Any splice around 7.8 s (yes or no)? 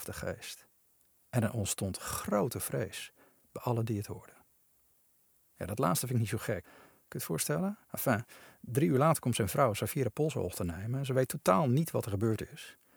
yes